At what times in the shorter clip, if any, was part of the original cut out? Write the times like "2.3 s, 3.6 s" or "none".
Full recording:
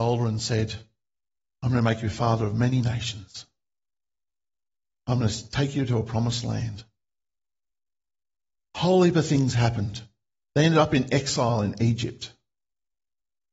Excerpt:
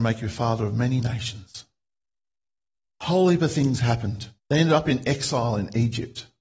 2.9 s, 4.4 s